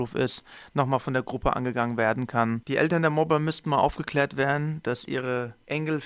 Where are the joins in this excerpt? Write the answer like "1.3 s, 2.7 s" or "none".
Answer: 2.6 s

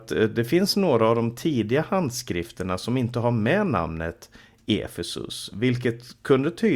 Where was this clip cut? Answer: none

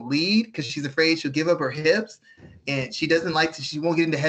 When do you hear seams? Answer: none

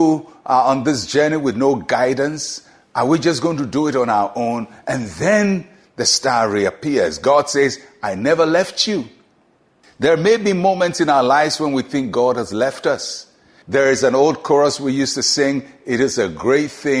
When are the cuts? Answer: 13.6 s

